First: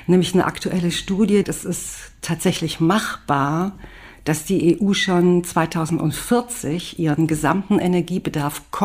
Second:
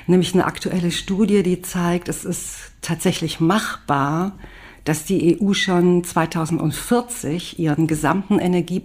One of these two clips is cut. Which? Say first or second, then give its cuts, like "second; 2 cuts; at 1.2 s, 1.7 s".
first; 1 cut; at 1.4 s